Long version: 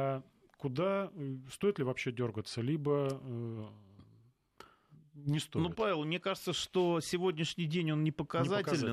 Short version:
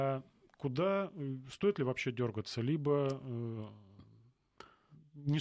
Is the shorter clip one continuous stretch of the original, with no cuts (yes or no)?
yes